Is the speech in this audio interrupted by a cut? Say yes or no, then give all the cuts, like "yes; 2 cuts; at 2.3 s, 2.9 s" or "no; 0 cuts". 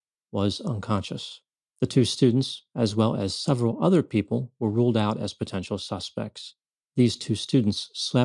yes; 2 cuts; at 1.6 s, 6.8 s